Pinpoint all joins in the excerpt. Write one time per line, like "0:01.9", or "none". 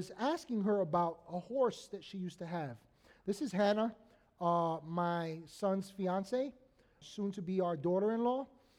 0:07.0